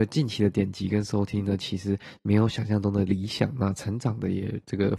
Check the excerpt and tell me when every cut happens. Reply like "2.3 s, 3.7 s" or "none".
none